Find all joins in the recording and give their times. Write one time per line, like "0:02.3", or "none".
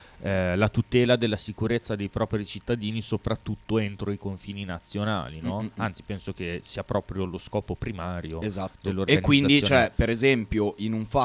none